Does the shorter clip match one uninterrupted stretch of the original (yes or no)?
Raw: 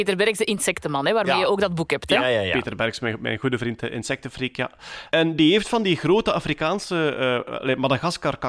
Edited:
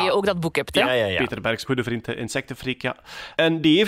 no